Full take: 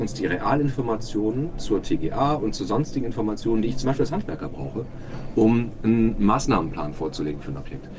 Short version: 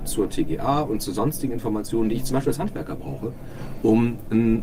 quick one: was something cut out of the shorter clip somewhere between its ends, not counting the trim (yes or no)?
no